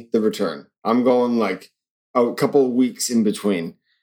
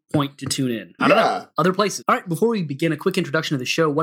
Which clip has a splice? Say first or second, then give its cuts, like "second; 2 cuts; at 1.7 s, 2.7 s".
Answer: second; 2 cuts; at 1.0 s, 2.0 s